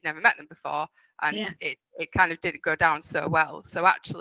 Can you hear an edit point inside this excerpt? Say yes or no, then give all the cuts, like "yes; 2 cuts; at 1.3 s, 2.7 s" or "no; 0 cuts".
no; 0 cuts